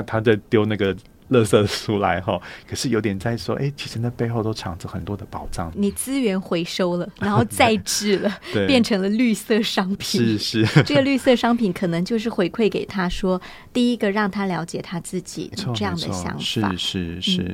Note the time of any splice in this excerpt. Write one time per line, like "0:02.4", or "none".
0:03.8
0:15.5

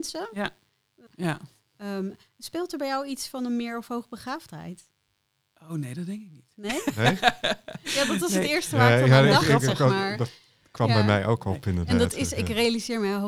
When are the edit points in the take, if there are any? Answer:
0:01.1

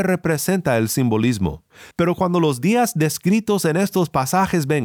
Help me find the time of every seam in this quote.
0:01.9

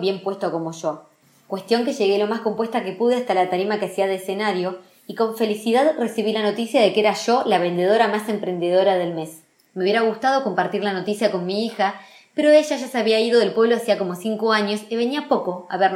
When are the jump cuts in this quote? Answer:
0:09.6

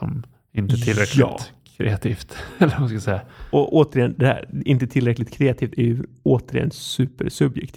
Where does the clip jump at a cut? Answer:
none

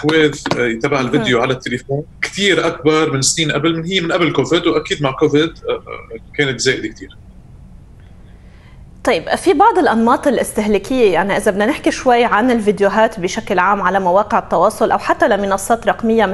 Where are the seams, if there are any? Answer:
0:02.1

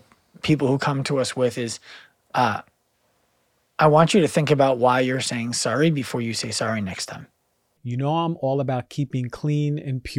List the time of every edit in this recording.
0:07.8

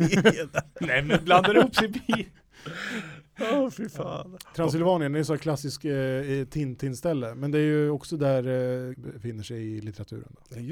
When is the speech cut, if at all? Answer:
0:08.9

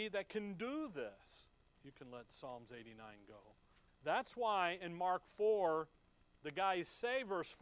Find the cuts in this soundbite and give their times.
0:01.7
0:03.9

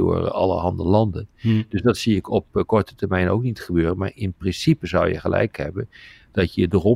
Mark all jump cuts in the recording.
none

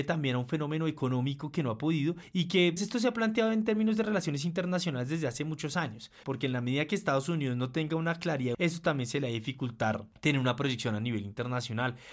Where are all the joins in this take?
0:02.8
0:06.2
0:08.5

